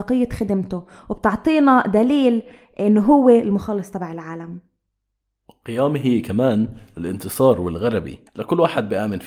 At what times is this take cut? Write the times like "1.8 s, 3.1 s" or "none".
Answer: 8.3 s